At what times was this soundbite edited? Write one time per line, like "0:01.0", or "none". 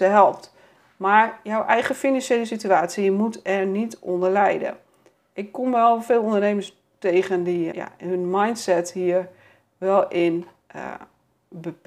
0:07.7